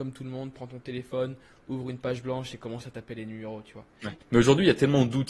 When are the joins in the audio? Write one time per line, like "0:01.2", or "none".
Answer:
0:04.2